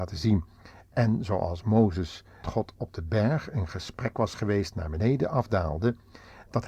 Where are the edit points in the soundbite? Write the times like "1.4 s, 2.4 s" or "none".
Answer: 2.4 s